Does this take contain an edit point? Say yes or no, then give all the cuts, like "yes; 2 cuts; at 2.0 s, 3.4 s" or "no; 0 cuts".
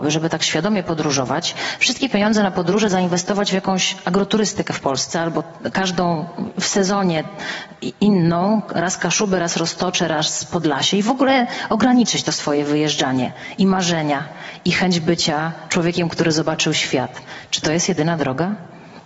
no; 0 cuts